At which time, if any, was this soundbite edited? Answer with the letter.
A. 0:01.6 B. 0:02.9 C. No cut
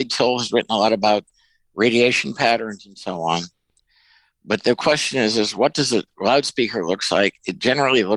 C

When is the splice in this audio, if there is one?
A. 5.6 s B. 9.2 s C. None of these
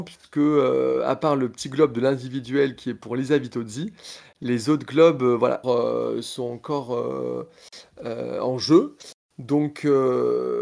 A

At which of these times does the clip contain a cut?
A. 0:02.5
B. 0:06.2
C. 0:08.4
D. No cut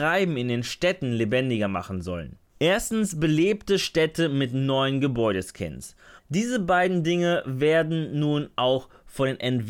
B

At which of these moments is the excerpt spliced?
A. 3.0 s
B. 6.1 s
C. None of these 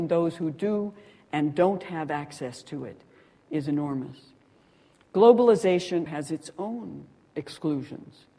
B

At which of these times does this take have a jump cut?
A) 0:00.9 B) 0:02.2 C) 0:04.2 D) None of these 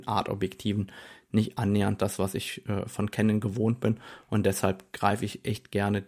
D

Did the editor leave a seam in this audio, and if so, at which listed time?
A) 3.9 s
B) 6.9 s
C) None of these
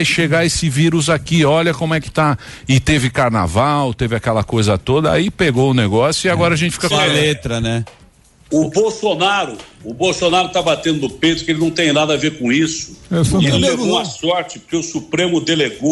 B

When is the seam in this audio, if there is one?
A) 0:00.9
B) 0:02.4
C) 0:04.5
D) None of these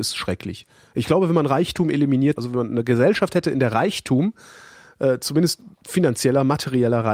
B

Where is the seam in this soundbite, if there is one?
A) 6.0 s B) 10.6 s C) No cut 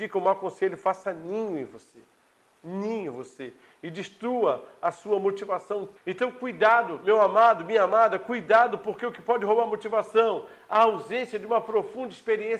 A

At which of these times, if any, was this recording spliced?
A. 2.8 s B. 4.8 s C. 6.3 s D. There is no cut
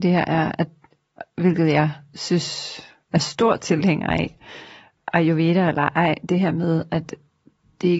D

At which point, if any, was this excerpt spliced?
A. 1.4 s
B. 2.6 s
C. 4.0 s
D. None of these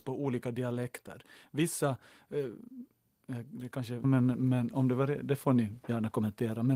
C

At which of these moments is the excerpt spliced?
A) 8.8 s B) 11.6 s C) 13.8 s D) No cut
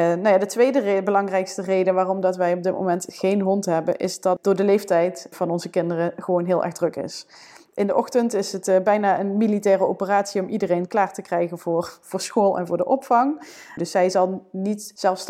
C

